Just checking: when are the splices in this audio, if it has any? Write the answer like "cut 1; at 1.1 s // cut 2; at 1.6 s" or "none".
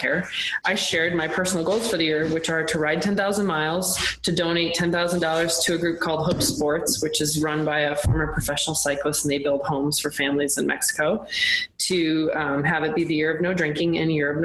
none